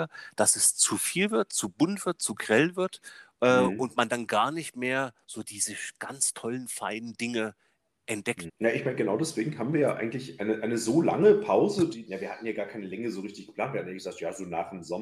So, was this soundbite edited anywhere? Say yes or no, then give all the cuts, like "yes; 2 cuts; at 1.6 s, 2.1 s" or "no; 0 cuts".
yes; 2 cuts; at 8.5 s, 12.1 s